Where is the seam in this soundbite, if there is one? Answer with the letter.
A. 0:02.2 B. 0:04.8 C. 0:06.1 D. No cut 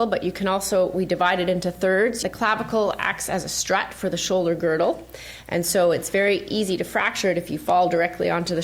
A